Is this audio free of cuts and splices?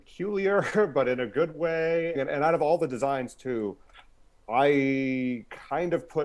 no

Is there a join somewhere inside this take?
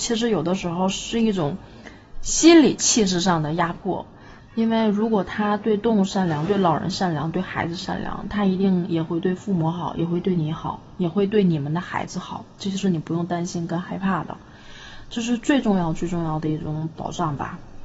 yes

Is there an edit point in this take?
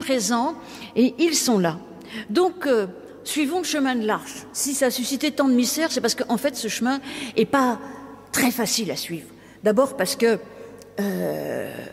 no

